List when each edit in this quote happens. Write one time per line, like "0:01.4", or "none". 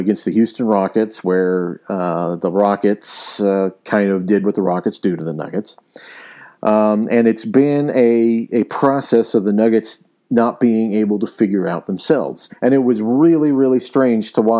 0:12.5